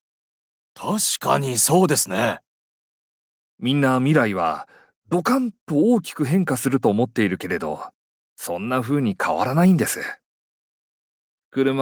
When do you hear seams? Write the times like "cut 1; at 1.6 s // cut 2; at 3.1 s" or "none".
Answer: none